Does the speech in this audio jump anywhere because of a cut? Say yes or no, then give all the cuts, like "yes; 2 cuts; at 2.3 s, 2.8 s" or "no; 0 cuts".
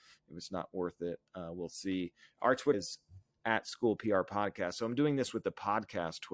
yes; 1 cut; at 2.7 s